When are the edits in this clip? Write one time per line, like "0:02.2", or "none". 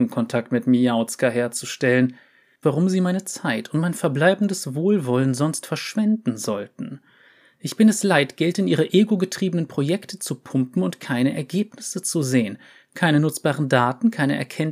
0:02.6